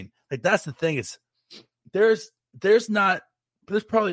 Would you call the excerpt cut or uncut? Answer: uncut